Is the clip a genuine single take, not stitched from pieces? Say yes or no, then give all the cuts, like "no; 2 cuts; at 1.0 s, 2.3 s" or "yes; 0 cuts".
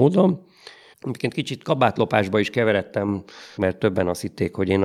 no; 2 cuts; at 0.9 s, 3.6 s